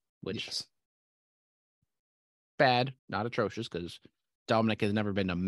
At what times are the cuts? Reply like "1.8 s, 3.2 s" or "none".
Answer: 3.0 s